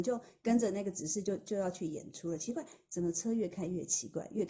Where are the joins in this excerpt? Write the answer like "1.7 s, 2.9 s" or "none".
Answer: none

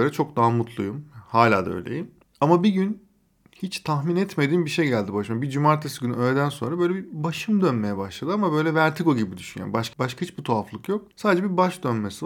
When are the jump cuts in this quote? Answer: 11.1 s

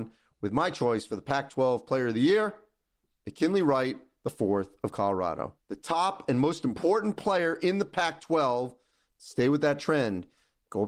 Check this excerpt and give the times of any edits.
5.6 s, 9.1 s

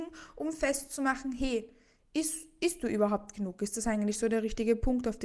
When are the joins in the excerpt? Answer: none

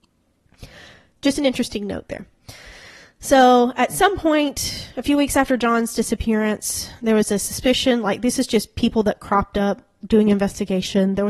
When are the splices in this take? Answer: none

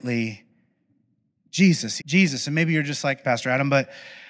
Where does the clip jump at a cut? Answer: 2.0 s, 3.2 s

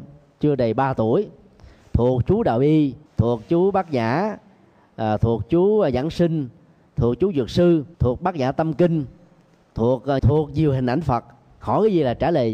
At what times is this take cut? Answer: 3.1 s, 7.9 s, 10.2 s

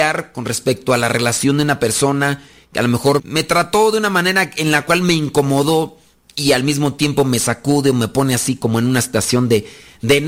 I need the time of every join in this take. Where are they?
3.2 s

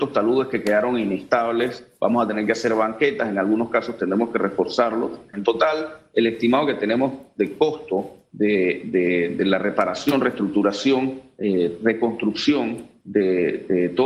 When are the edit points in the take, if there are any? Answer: 5.3 s

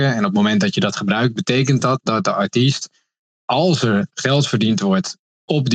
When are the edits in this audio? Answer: none

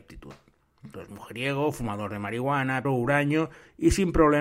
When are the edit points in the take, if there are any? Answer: 0.9 s, 2.8 s

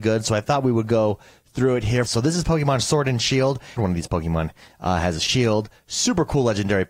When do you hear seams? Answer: 2.1 s, 3.8 s

